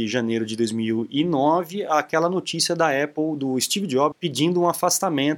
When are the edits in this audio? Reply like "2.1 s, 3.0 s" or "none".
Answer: 4.1 s